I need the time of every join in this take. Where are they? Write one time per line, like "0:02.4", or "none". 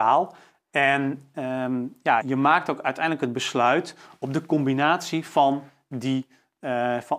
0:02.2